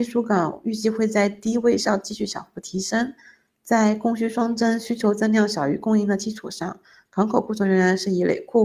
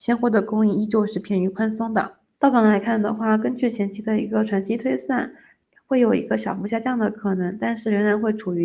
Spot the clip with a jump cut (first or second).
second